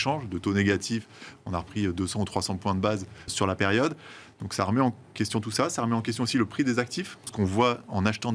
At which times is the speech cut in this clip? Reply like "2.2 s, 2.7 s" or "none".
3.3 s, 7.3 s